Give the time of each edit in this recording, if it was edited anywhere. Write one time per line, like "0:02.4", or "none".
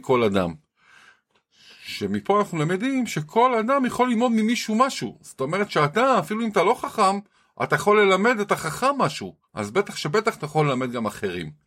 0:09.5